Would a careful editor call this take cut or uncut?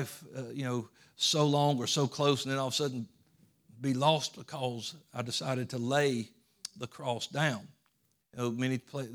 cut